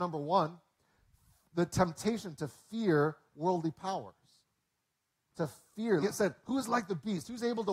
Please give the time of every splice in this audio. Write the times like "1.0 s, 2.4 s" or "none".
6.0 s